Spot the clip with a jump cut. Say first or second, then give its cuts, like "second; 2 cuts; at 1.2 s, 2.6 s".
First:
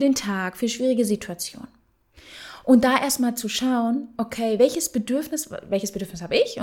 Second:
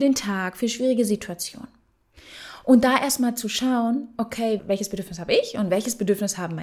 second; 1 cut; at 4.6 s